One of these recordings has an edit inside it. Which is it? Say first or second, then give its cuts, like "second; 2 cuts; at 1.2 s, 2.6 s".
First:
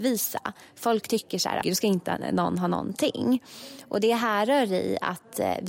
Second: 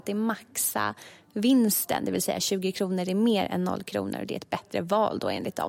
first; 1 cut; at 1.6 s